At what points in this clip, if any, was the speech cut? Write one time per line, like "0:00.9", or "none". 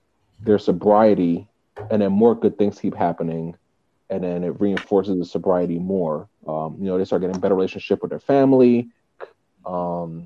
0:06.4
0:09.2

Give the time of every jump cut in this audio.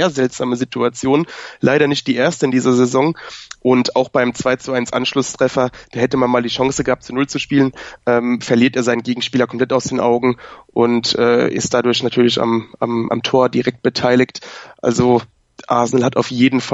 none

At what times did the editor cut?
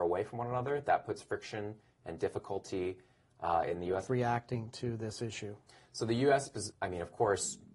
0:04.1
0:06.7

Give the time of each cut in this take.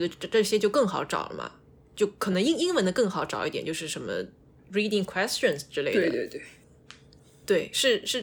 none

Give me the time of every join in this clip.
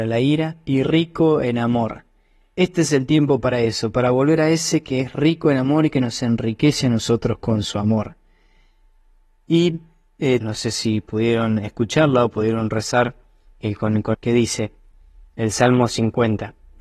0:10.4
0:14.1

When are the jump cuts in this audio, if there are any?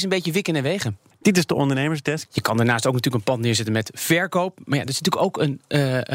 0:01.1
0:02.3

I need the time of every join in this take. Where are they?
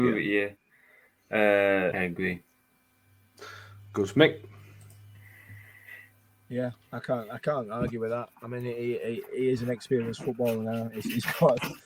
0:01.9

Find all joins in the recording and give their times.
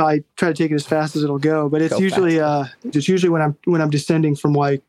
0:02.9

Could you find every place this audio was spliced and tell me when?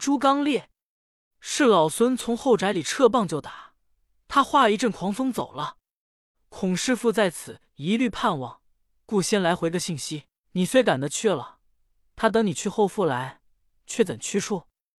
0:06.3
0:10.4

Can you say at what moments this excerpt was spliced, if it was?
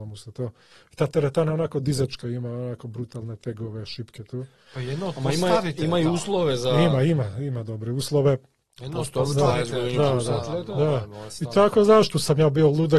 none

